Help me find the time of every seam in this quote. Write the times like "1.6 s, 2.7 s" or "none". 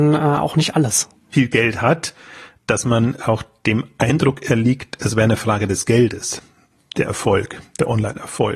1.3 s, 2.6 s